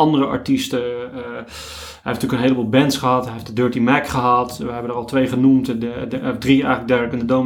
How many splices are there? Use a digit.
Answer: 0